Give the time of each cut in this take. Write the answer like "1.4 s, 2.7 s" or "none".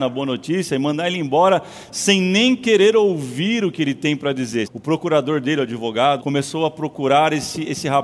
4.6 s, 6.2 s